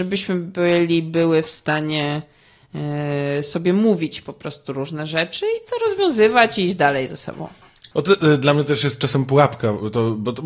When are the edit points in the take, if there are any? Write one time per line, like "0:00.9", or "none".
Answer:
0:07.9

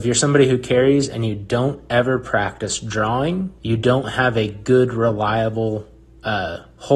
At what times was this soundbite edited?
0:03.6

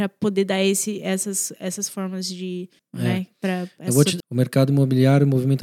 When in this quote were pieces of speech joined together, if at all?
0:02.8
0:04.2

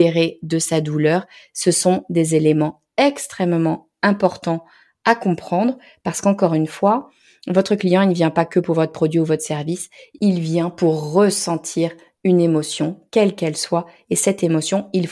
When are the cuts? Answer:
none

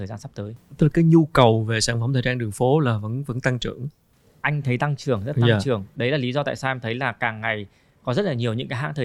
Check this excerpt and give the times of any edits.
none

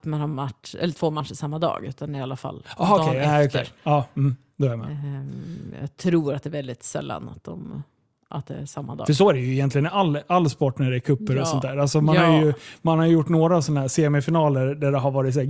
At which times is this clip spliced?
none

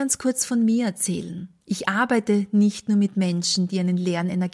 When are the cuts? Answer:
0:01.6

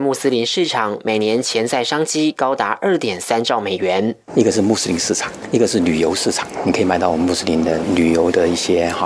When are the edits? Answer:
none

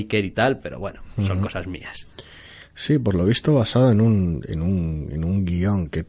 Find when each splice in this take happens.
none

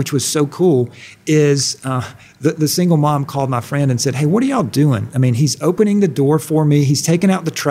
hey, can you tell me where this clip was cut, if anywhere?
none

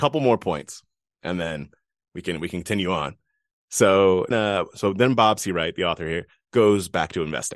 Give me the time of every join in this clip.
0:04.3

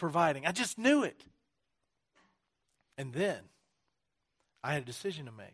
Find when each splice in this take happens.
0:02.9

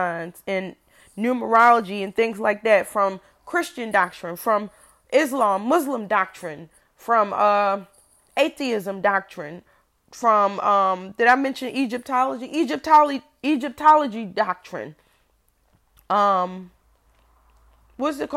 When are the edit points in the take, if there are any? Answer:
none

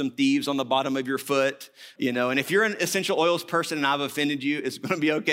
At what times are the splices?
0:02.0

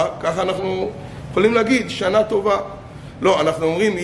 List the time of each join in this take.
none

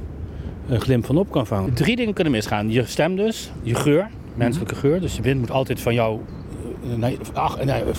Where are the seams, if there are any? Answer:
0:01.7

